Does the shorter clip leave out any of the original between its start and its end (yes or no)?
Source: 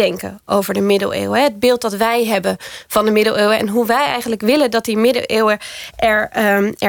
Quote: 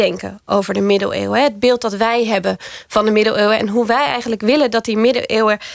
no